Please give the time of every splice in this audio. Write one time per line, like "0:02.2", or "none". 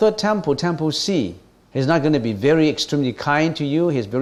0:01.6

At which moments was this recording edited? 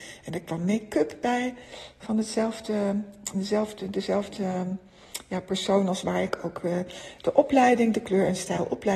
none

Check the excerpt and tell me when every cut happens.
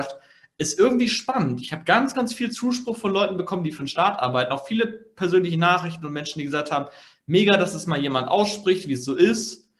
none

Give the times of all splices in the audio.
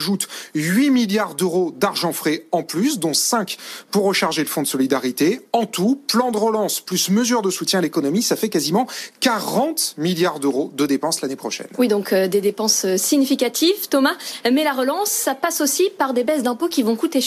none

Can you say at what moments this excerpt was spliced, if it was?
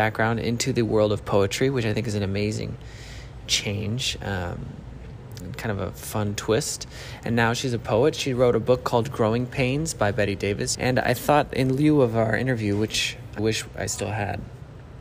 0:10.7
0:13.4

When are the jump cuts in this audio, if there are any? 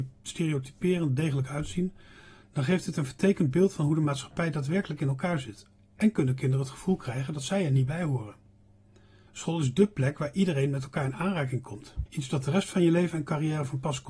0:09.3
0:12.1

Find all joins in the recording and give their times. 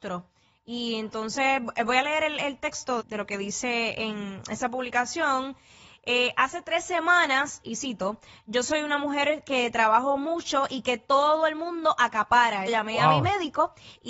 0:03.0
0:12.7

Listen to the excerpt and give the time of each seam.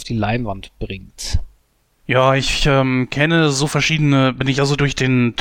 none

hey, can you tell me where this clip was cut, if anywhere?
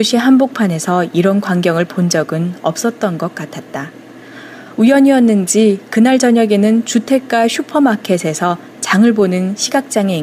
none

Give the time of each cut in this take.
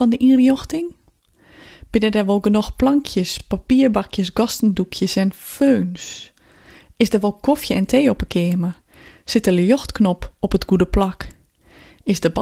none

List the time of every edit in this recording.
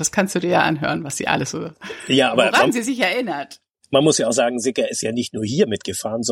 none

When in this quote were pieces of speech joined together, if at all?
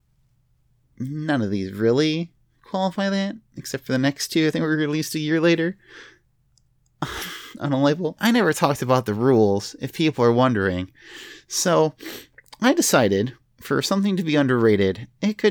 0:08.2

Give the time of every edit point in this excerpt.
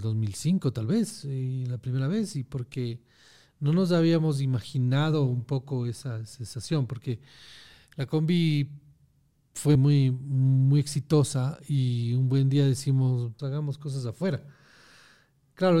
0:09.7
0:13.4

